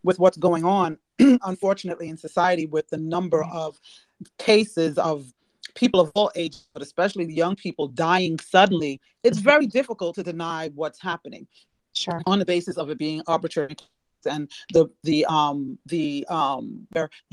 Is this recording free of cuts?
no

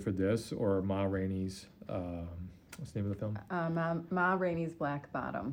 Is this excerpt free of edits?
yes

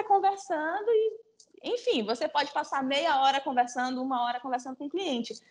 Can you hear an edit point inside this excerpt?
no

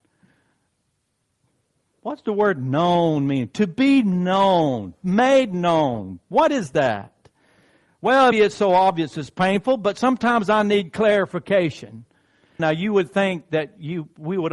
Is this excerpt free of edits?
no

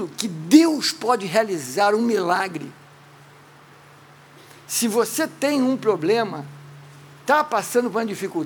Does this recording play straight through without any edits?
yes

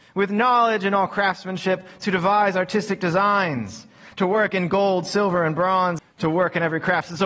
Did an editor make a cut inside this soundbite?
yes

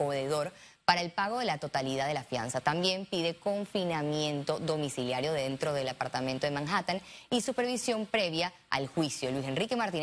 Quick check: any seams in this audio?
no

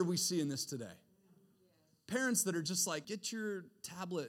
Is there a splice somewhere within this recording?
yes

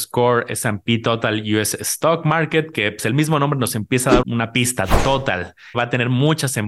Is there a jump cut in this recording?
yes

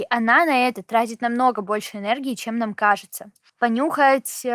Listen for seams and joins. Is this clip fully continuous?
no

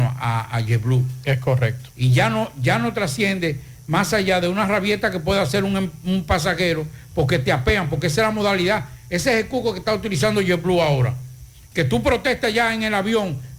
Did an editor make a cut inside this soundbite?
yes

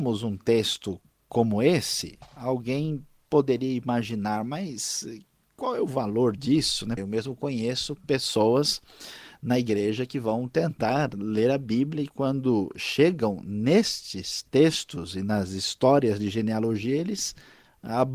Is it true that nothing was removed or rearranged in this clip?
no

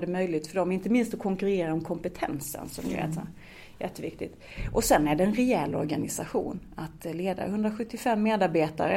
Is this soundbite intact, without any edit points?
yes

